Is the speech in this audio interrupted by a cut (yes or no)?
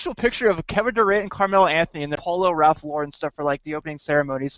yes